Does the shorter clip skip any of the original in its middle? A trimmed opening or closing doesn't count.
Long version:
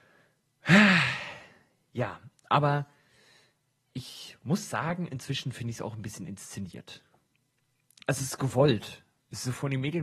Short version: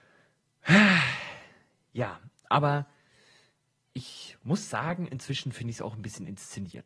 no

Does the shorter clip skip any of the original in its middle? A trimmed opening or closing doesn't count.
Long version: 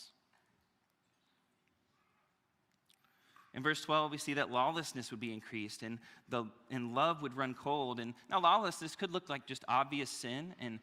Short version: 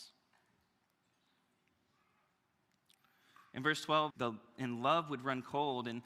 yes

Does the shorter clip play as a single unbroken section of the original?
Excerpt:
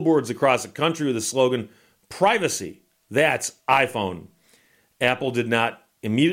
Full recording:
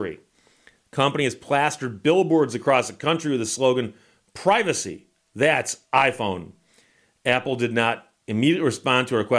yes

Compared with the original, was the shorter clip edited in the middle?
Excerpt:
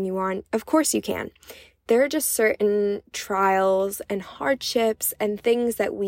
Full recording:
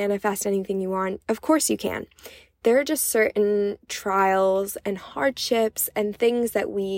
no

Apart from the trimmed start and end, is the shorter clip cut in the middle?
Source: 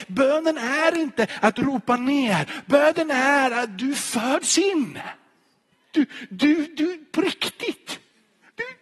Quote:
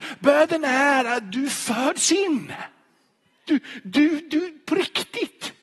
no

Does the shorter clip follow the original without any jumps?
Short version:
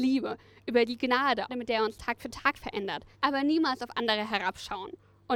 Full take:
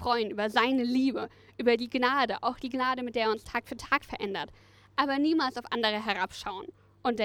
no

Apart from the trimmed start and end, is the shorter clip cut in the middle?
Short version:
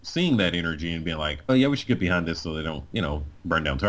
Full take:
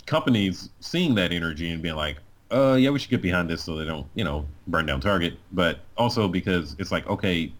yes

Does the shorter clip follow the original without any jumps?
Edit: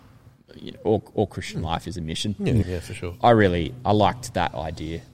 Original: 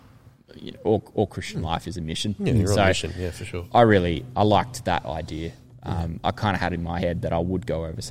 no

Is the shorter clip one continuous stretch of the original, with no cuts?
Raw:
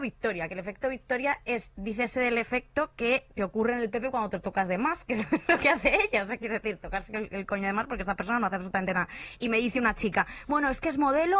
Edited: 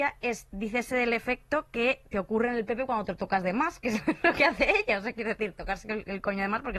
yes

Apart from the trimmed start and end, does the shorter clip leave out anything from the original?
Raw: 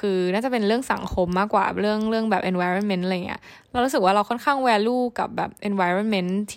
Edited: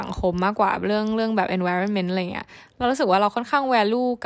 no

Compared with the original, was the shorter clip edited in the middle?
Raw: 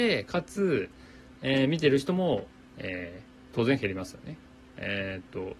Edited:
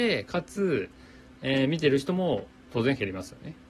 yes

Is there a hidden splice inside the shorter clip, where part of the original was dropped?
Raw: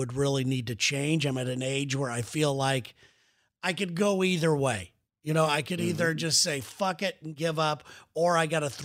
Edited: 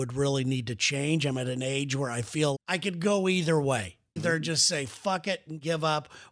yes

